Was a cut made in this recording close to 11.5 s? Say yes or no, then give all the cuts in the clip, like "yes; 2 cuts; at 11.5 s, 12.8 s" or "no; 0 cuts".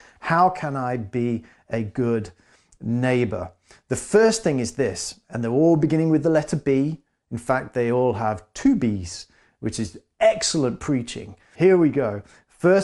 yes; 1 cut; at 11.5 s